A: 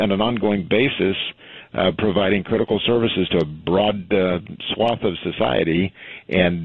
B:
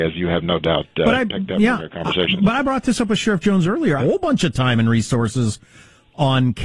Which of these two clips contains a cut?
B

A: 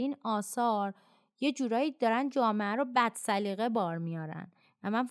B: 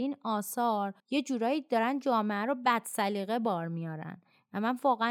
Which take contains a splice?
B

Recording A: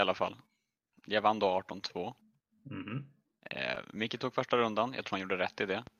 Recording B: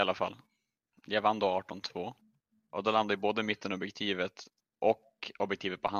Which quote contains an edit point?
B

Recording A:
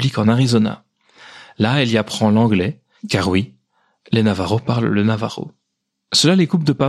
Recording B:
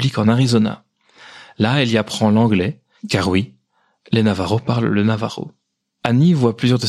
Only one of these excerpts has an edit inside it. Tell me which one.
B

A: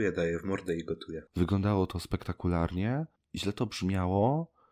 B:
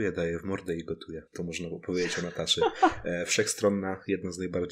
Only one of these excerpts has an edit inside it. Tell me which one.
A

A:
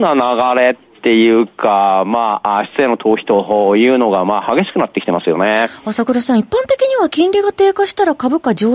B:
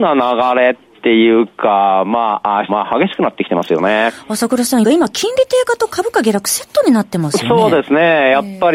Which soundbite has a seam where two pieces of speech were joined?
B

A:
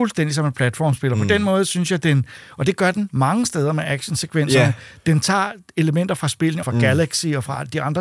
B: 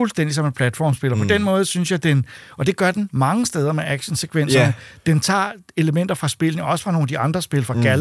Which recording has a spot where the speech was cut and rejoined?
A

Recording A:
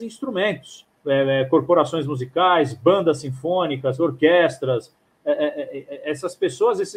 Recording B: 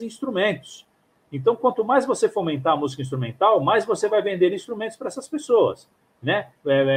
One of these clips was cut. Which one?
A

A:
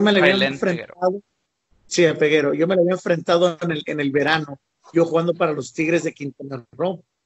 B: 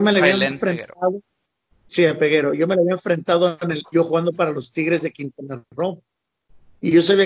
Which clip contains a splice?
B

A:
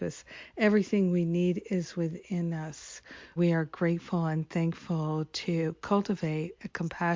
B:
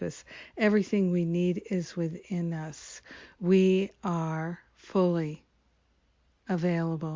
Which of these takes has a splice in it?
A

